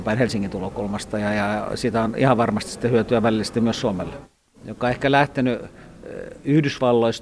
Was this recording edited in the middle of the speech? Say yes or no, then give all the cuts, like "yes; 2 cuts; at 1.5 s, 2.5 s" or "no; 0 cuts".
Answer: yes; 1 cut; at 4.5 s